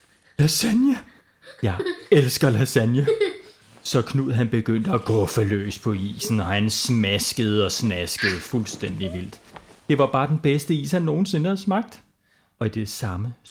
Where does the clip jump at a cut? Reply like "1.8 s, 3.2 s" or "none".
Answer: none